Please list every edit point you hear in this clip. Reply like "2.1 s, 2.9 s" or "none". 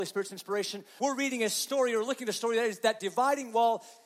1.0 s